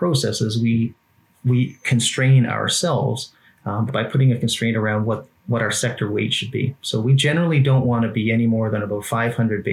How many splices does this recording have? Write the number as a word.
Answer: one